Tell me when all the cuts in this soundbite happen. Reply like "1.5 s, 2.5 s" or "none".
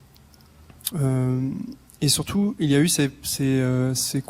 0.9 s